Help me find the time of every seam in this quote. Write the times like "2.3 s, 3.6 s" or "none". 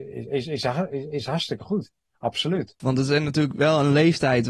2.8 s